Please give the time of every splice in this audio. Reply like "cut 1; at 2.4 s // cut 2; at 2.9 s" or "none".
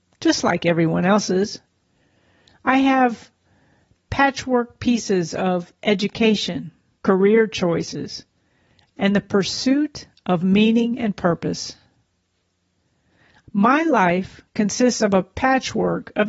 cut 1; at 6.9 s // cut 2; at 13.4 s